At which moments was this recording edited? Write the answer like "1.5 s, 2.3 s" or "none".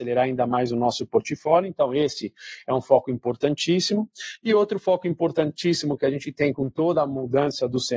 none